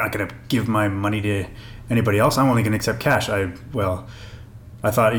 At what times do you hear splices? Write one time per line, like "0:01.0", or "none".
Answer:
none